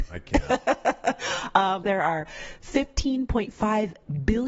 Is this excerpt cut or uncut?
cut